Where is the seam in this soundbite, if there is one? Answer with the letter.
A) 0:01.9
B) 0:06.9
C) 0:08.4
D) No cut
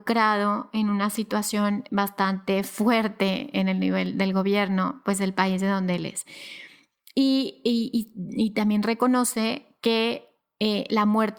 A